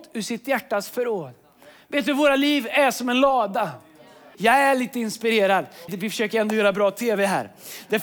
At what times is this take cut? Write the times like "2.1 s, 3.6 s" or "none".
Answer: 4.3 s, 5.9 s